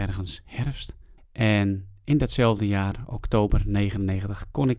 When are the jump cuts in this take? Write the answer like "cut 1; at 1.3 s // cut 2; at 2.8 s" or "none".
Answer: cut 1; at 1.2 s

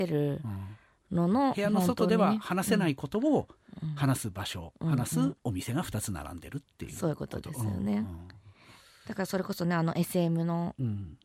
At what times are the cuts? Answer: cut 1; at 5.4 s

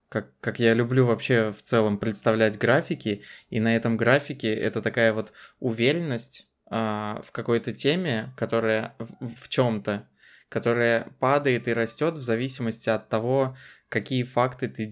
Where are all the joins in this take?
cut 1; at 9.4 s

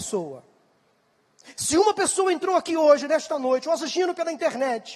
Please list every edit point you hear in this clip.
none

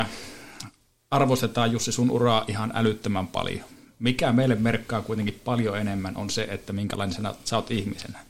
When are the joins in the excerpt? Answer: none

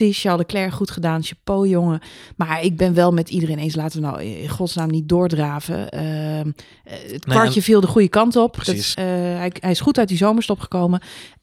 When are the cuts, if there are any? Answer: cut 1; at 8.9 s

